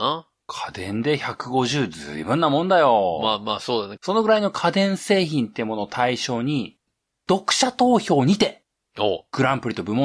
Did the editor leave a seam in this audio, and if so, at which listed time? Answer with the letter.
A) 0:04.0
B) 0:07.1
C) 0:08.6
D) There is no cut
A